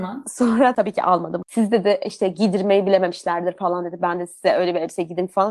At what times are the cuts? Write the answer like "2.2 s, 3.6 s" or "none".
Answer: 1.4 s